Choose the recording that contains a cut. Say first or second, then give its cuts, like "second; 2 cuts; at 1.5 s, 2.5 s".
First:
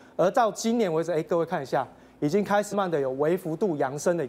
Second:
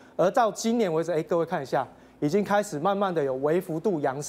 first; 1 cut; at 2.7 s